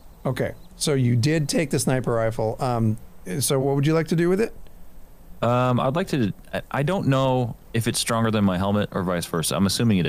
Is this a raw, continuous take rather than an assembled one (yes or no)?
no